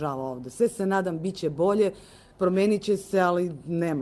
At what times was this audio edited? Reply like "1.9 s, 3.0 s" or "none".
none